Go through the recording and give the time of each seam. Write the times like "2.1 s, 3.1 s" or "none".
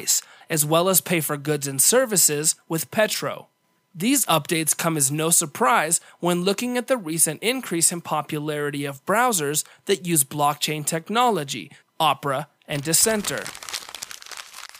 3.8 s, 11.8 s

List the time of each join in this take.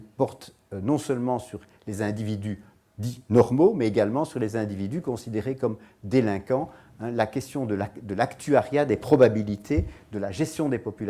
none

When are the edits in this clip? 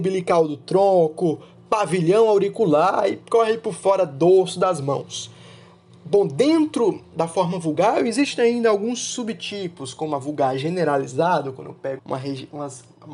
12.0 s

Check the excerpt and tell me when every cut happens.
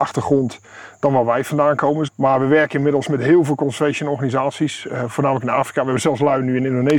2.1 s

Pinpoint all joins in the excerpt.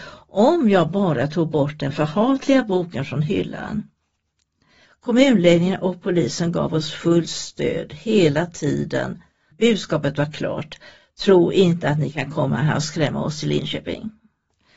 4.8 s

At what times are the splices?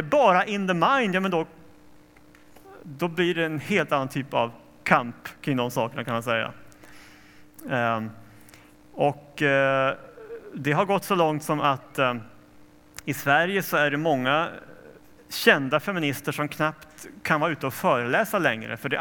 none

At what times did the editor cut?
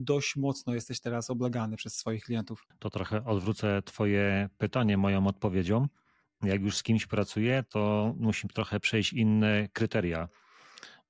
2.7 s

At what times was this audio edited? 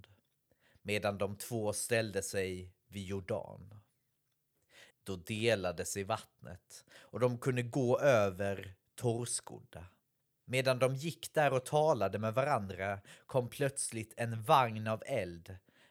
4.9 s, 10.4 s

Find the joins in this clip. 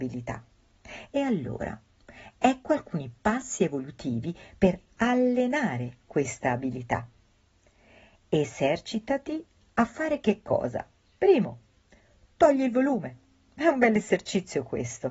none

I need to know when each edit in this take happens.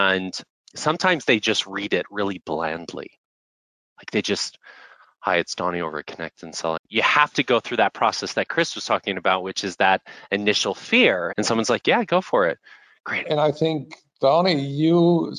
6.8 s, 11.3 s, 13.2 s

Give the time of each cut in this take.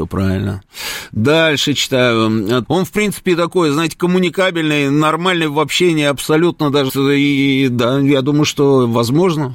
2.7 s, 6.9 s

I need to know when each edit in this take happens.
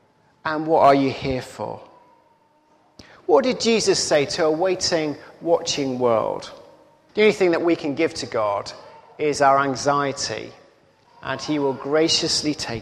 7.1 s

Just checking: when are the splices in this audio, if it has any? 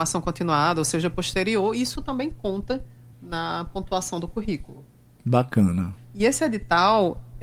3.1 s, 6.0 s

